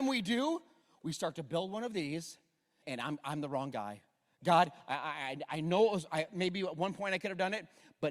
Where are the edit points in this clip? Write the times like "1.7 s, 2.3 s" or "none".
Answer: 2.8 s